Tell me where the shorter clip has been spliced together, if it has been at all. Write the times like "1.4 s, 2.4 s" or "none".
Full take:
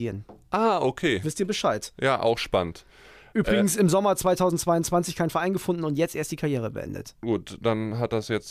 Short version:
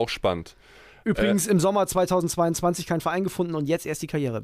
none